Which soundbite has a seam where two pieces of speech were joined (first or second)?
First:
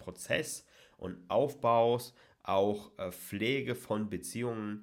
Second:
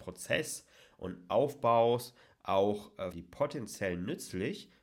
second